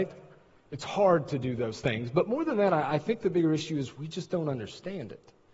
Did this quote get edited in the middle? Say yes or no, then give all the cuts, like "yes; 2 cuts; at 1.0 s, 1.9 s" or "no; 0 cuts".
no; 0 cuts